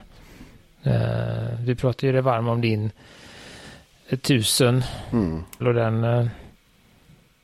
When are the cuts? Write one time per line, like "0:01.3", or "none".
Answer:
0:05.6